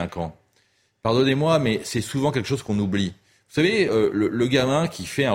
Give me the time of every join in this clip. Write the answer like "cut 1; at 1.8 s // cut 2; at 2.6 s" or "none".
none